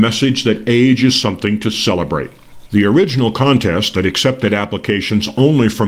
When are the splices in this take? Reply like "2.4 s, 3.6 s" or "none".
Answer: 2.7 s